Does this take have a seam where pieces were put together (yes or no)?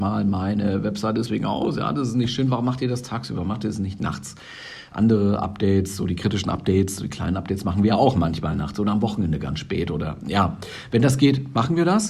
no